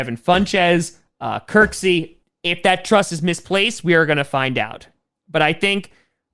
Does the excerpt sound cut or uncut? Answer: cut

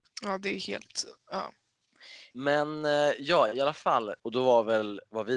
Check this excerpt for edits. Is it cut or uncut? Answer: cut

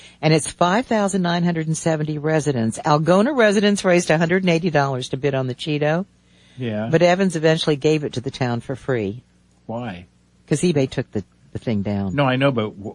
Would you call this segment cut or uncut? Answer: uncut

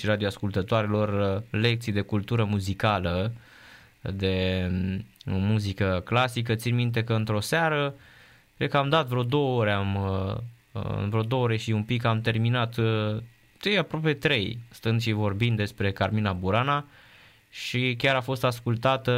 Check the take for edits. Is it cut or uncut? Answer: uncut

